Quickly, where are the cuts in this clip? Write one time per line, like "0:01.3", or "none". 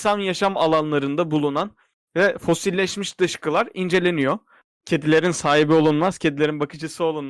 0:04.7